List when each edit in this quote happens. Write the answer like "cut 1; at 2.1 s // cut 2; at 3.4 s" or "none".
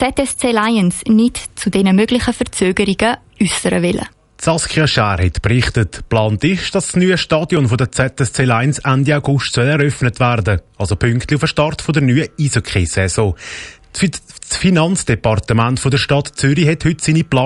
cut 1; at 13.8 s